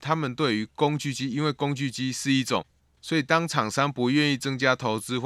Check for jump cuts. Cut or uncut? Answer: cut